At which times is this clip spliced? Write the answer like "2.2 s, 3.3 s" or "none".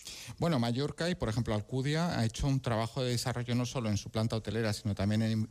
none